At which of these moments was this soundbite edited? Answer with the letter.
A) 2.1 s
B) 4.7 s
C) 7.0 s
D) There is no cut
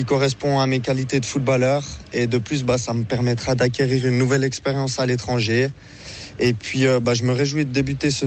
D